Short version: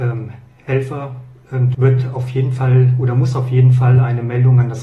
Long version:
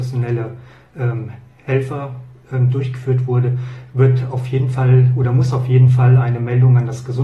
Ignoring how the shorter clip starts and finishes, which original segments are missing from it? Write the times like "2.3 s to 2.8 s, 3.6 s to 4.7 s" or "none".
2.7 s to 3.9 s